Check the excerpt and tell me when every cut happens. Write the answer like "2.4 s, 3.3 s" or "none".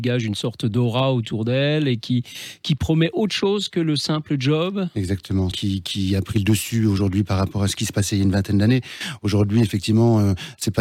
5.5 s